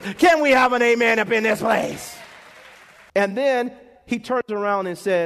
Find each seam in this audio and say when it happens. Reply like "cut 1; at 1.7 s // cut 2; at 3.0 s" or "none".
cut 1; at 3.1 s